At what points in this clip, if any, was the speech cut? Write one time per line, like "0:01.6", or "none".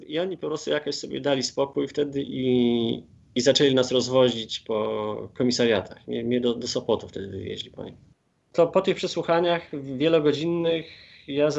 none